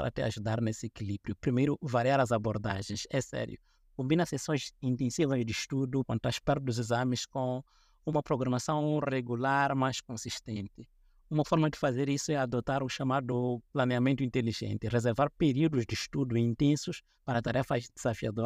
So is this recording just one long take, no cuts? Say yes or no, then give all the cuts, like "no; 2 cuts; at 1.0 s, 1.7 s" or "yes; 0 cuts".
no; 1 cut; at 6.0 s